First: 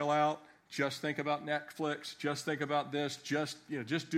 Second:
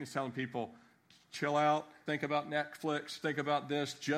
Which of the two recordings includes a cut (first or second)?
second